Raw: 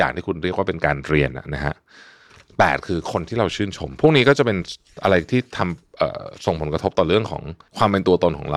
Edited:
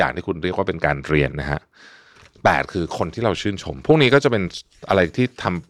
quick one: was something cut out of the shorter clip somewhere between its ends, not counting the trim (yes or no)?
yes